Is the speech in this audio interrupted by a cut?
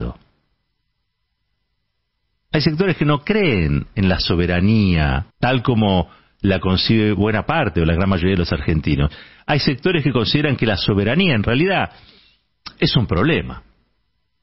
yes; 1 cut; at 5.3 s

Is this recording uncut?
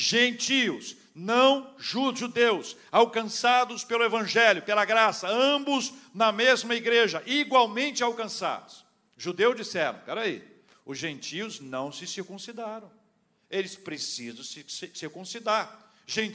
yes; 0 cuts

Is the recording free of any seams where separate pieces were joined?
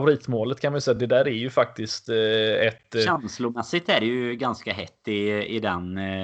yes; 0 cuts

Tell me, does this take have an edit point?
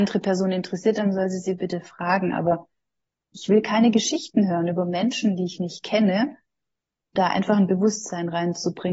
yes; 1 cut; at 7.2 s

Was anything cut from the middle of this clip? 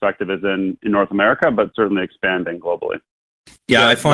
no; 0 cuts

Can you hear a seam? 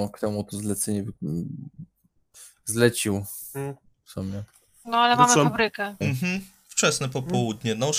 yes; 2 cuts; at 1.2 s, 6.0 s

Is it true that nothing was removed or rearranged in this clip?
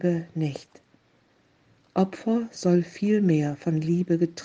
yes; 0 cuts

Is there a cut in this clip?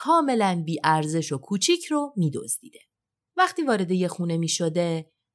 no; 0 cuts

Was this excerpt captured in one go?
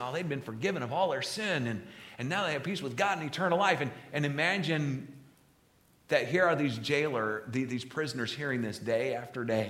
yes; 0 cuts

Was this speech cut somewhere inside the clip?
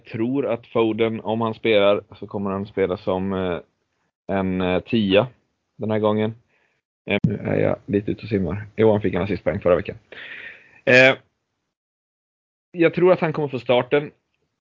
yes; 1 cut; at 7.2 s

